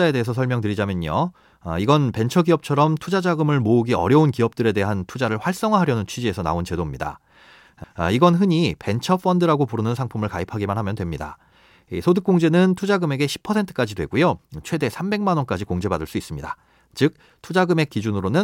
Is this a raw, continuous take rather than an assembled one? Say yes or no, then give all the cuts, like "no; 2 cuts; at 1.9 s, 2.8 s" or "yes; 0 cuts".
no; 1 cut; at 7.8 s